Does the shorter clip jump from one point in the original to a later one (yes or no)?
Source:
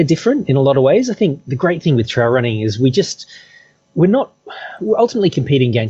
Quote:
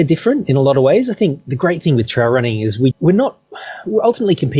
yes